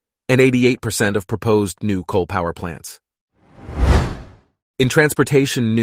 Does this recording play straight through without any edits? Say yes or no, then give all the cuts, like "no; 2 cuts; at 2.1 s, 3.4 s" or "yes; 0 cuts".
yes; 0 cuts